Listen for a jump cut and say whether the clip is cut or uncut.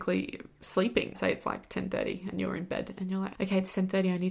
cut